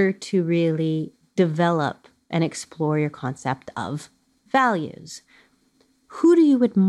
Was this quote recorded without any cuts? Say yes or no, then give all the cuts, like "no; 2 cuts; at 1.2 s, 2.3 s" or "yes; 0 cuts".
yes; 0 cuts